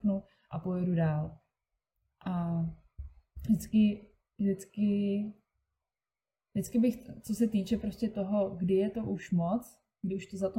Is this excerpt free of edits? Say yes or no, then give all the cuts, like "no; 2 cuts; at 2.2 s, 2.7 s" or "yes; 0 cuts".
yes; 0 cuts